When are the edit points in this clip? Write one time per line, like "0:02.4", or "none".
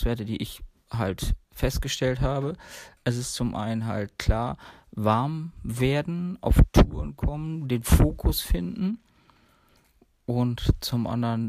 0:03.0